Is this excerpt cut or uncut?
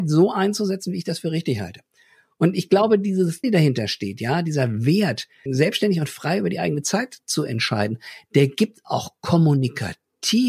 cut